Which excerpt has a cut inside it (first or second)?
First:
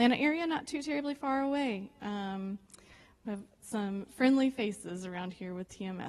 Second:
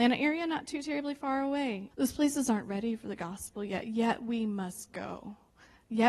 second